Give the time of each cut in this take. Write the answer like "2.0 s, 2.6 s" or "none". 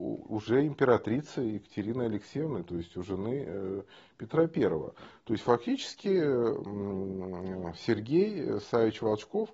none